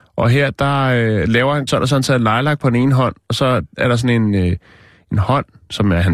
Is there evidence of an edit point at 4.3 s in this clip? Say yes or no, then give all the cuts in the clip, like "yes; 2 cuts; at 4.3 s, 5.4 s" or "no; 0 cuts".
no; 1 cut; at 1.7 s